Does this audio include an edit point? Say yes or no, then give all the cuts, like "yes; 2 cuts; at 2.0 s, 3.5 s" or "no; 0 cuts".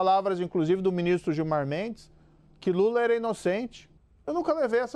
no; 0 cuts